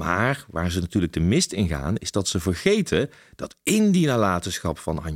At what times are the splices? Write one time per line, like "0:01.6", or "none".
none